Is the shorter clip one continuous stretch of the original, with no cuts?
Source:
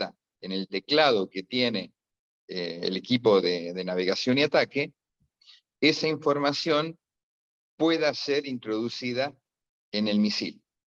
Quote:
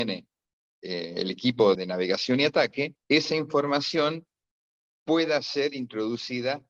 no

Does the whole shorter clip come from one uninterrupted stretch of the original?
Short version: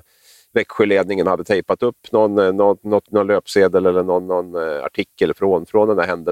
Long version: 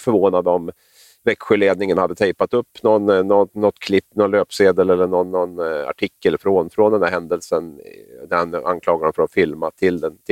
no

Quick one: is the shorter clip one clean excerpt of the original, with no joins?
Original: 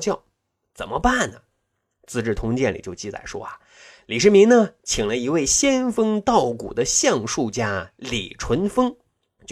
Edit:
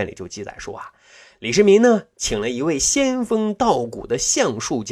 yes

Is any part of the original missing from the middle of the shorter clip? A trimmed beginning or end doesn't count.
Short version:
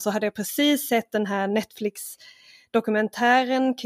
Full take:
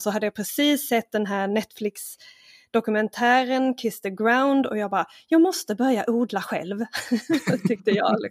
no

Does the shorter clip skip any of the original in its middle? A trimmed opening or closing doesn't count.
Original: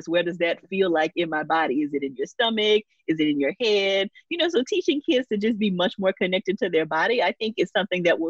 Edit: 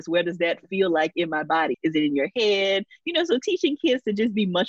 yes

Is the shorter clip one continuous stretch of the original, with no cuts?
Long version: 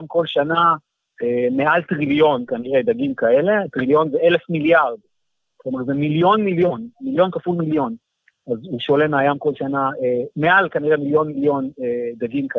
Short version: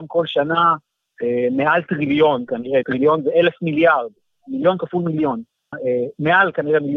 no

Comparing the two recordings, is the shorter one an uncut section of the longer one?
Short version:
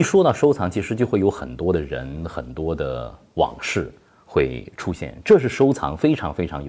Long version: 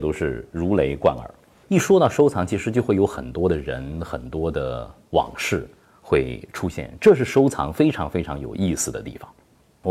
yes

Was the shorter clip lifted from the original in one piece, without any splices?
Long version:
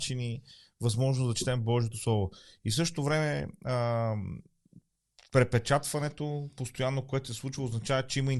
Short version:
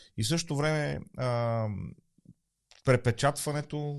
yes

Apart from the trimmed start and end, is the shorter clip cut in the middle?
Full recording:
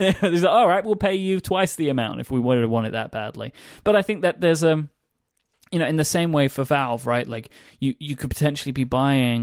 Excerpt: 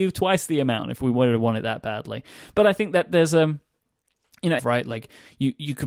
yes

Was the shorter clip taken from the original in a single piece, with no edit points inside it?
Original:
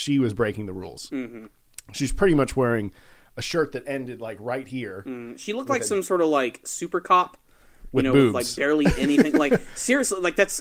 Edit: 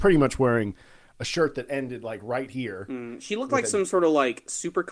yes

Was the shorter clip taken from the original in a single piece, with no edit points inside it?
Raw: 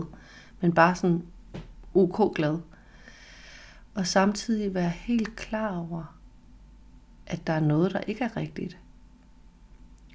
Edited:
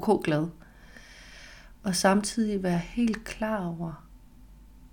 yes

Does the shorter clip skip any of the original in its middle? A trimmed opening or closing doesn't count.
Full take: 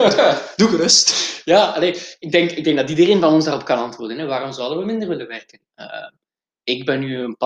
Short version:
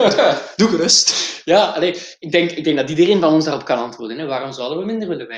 no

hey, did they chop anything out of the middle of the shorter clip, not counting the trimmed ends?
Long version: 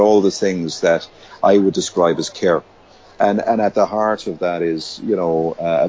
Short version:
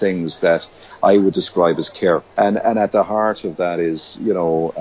yes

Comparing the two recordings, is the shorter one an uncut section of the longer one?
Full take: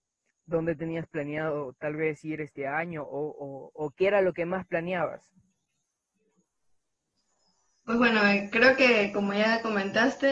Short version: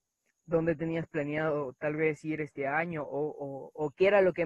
yes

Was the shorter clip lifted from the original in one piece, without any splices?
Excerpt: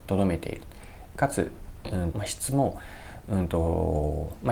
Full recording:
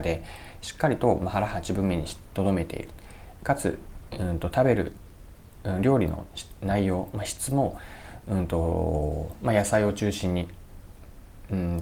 no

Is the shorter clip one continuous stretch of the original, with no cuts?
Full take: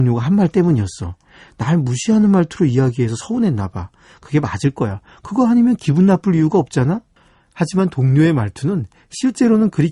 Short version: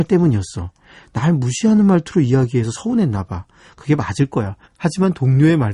no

